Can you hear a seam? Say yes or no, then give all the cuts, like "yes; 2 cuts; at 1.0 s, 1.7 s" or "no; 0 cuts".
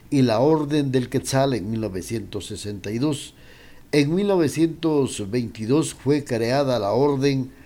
no; 0 cuts